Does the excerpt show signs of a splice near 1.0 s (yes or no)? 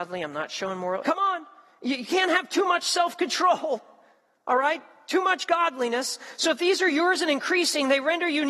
yes